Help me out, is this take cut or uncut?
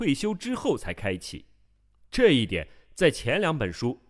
cut